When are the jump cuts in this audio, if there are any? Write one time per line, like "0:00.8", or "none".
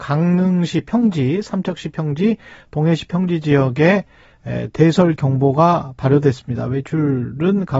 none